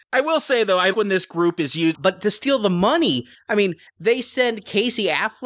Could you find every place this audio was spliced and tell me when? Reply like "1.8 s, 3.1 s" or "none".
0.9 s, 1.9 s